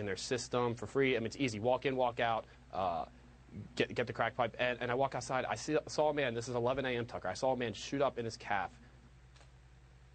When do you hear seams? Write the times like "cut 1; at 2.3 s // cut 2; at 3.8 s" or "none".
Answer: none